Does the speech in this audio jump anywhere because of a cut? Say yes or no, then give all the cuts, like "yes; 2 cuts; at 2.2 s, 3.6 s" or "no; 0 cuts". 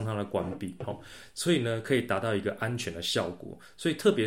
no; 0 cuts